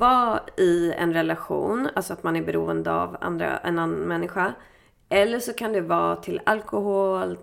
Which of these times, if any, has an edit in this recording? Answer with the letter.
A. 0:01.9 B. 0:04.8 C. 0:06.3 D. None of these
D